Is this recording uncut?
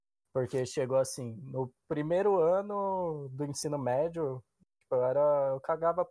yes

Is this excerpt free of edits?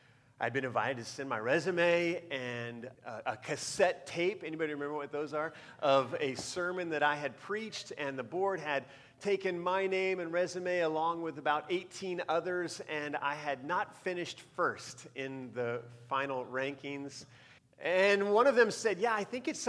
no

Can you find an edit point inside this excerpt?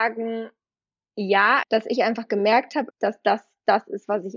yes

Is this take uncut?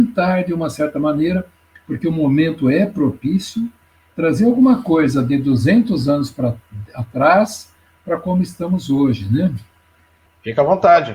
no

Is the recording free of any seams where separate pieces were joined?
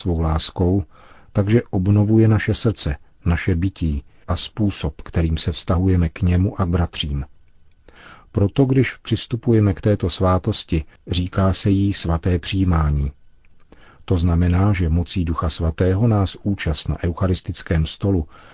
yes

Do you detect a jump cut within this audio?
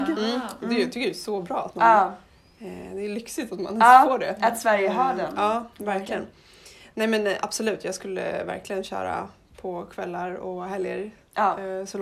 no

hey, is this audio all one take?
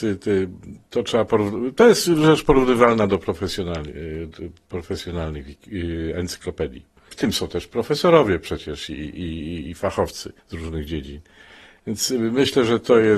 no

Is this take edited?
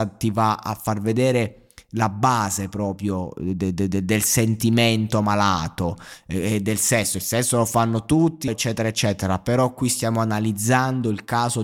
yes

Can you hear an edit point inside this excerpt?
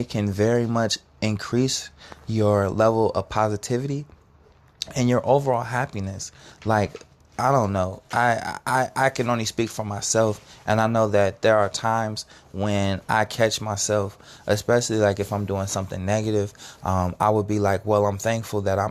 no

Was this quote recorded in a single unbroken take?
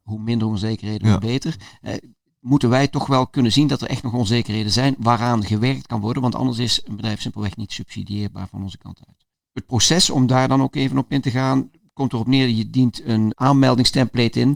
yes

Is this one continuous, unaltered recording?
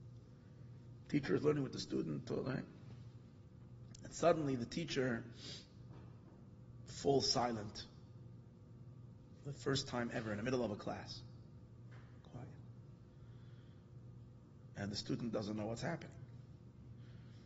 yes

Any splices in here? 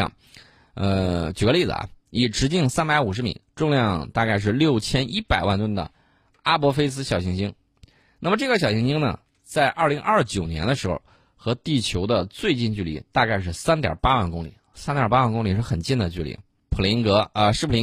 yes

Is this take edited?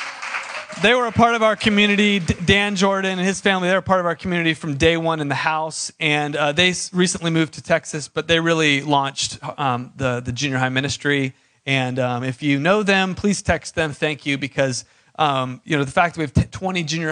no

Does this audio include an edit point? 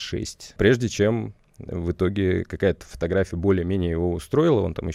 no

